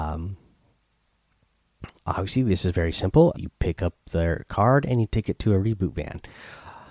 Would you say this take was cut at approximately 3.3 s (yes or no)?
yes